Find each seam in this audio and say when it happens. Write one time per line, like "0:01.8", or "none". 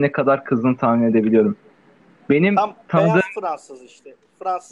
none